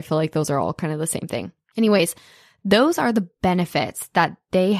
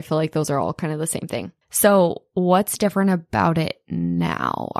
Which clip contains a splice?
second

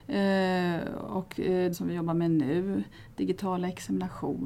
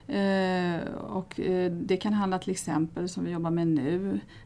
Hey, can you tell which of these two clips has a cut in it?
first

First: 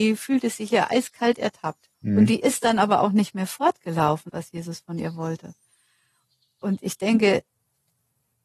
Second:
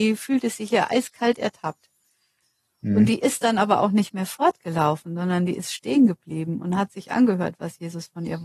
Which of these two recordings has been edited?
first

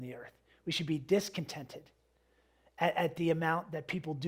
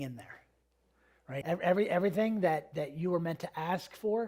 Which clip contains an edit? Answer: second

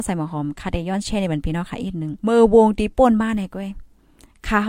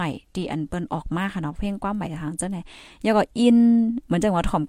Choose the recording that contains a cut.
first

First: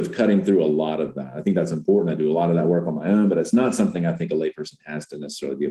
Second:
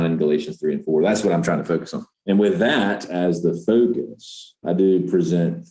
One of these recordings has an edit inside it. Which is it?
second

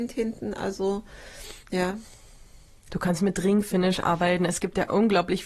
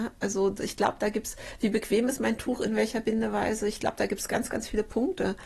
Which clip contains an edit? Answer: first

